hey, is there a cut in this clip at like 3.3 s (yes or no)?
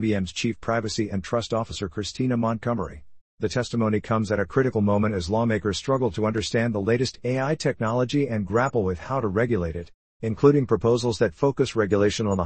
yes